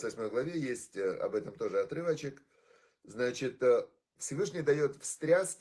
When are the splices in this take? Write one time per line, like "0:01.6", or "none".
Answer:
none